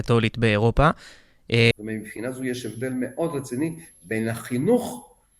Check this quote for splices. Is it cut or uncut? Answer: cut